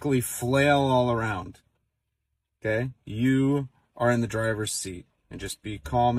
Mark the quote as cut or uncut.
uncut